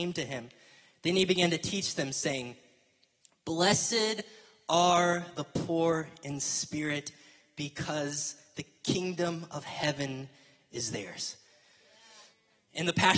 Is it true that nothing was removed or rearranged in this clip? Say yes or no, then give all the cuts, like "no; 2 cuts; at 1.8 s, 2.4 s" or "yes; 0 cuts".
yes; 0 cuts